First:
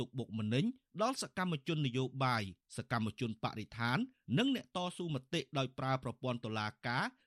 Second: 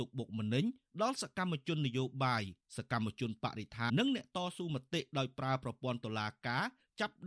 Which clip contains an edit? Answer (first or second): second